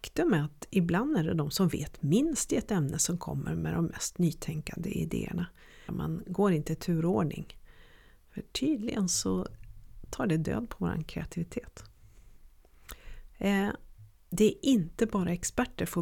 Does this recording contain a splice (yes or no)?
yes